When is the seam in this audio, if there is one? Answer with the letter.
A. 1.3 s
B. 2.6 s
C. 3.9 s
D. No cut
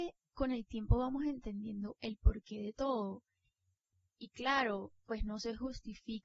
D